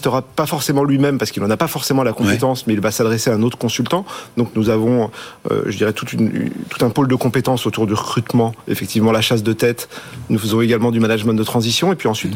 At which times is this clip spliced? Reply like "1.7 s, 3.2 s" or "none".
none